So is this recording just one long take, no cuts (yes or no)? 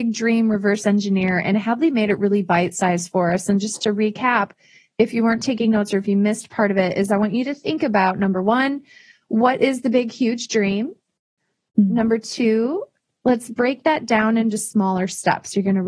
yes